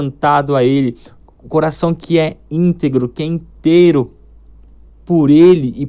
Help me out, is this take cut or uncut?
uncut